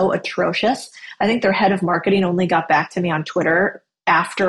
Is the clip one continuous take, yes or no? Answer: yes